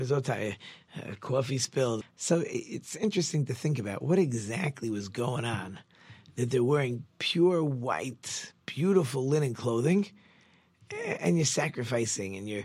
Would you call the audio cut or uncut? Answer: cut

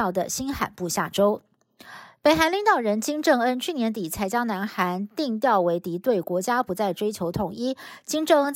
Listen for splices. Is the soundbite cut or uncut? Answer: uncut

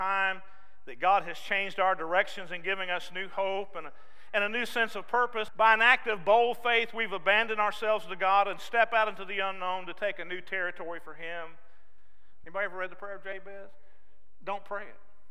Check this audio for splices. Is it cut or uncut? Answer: cut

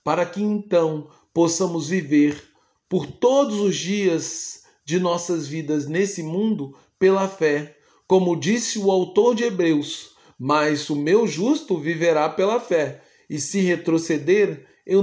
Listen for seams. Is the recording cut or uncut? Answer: uncut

